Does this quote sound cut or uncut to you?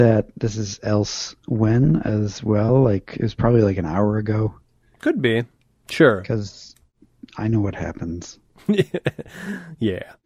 uncut